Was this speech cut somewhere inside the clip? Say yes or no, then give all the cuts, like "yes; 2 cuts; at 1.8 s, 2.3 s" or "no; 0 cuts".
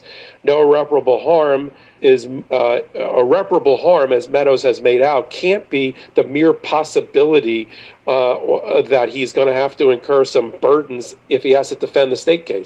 yes; 1 cut; at 2.0 s